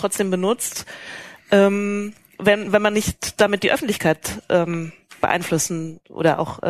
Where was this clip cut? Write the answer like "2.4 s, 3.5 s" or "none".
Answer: none